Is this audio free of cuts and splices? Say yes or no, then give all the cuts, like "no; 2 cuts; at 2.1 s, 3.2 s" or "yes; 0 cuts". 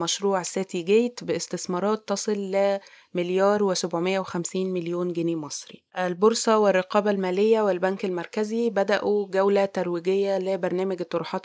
no; 1 cut; at 5.9 s